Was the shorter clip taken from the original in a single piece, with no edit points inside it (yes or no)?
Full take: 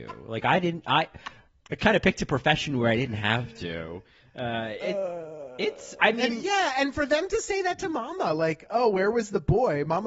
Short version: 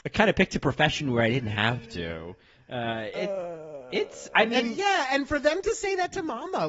yes